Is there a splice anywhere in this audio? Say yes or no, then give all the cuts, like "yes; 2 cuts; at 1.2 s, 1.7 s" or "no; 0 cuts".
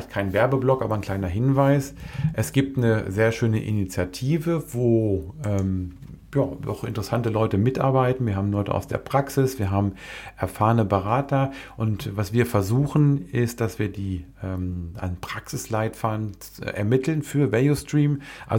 no; 0 cuts